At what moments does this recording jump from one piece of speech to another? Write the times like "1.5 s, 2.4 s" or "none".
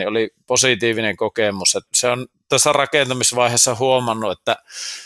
1.9 s